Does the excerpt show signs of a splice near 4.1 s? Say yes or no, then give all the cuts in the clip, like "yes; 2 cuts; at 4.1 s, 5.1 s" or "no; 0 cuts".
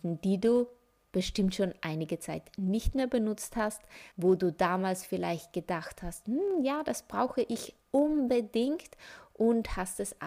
yes; 1 cut; at 4.1 s